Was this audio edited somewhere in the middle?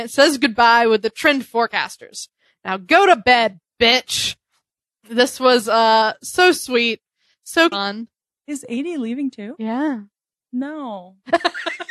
yes; 1 cut; at 7.7 s

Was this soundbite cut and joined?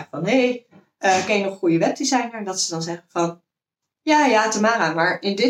no; 0 cuts

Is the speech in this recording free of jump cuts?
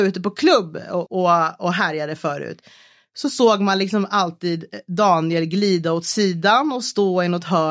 no; 1 cut; at 1.1 s

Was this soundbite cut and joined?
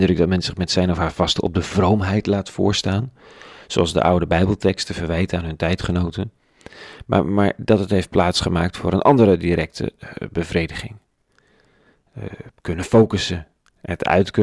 no; 0 cuts

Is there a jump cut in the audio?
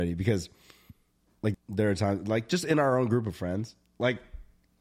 yes; 1 cut; at 1.5 s

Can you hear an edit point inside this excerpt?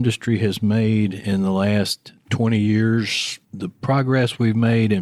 yes; 1 cut; at 3.4 s

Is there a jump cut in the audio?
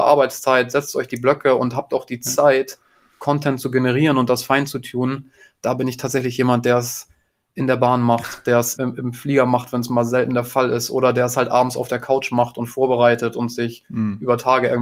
yes; 1 cut; at 8.8 s

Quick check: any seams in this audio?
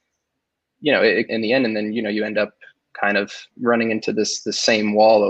yes; 2 cuts; at 1.3 s, 3.5 s

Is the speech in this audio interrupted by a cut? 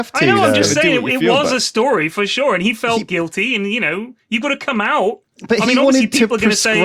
no; 0 cuts

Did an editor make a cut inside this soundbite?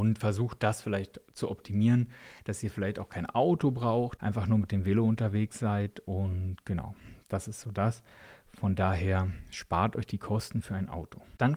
no; 0 cuts

